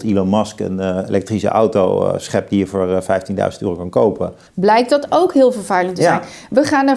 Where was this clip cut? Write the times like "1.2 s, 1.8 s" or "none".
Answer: 4.5 s